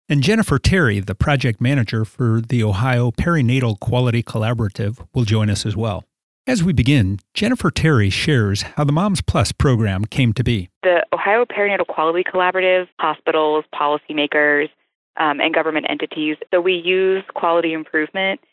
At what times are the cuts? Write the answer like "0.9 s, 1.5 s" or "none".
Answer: 12.9 s, 16.5 s